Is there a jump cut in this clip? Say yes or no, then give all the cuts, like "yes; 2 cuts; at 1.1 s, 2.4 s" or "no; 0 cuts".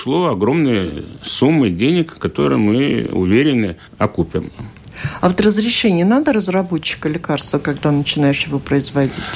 yes; 1 cut; at 3.9 s